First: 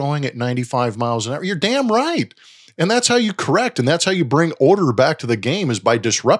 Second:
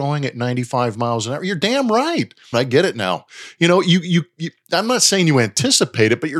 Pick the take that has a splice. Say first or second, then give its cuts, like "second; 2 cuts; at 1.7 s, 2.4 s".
second; 1 cut; at 2.5 s